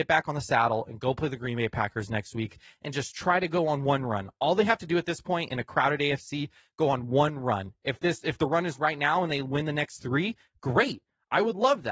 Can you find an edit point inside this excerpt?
no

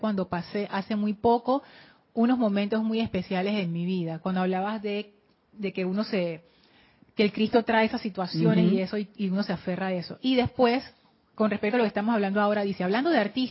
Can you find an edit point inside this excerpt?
no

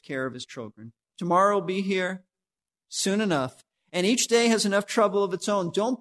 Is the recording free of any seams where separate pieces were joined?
no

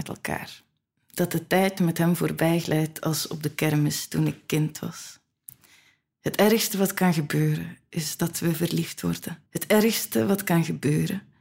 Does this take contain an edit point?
yes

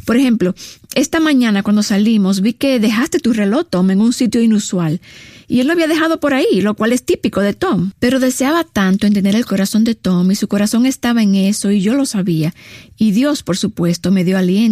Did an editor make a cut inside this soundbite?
yes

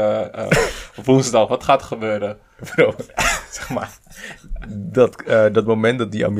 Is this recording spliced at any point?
no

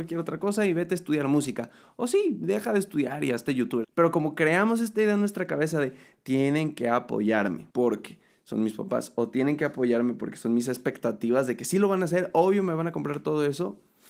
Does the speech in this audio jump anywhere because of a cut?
yes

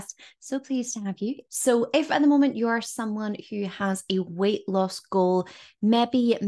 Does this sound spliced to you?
yes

